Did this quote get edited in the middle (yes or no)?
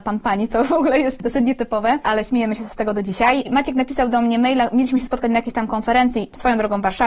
yes